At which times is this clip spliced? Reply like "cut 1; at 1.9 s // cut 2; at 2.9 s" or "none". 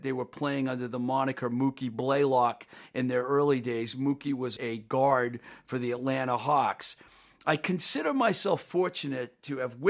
cut 1; at 4.6 s